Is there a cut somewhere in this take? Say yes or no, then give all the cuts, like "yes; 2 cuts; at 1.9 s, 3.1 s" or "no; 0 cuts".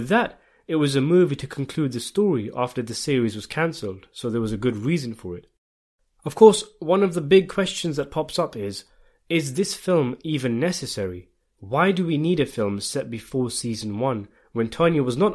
no; 0 cuts